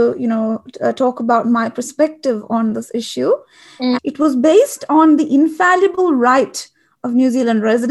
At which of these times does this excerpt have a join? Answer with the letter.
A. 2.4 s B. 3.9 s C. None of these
B